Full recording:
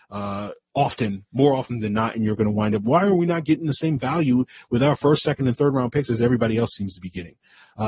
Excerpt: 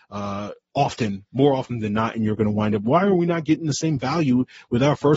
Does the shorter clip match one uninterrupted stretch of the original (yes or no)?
yes